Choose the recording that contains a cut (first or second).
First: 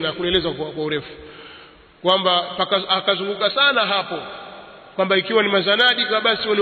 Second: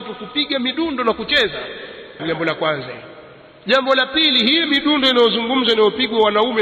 second